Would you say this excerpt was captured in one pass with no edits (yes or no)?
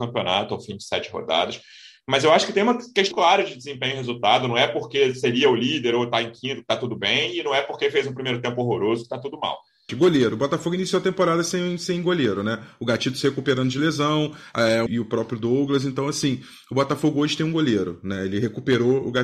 no